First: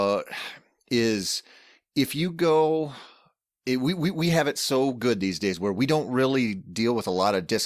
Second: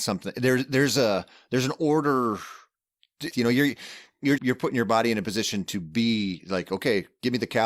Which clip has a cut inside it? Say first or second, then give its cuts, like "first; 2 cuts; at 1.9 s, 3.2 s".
second; 2 cuts; at 3.3 s, 4.4 s